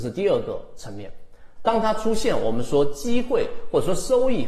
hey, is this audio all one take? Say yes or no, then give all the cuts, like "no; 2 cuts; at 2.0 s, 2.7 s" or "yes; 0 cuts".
no; 1 cut; at 1.6 s